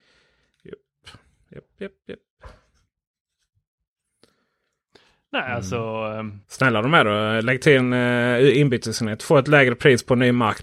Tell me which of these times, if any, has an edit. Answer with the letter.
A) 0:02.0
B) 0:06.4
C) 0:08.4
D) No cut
B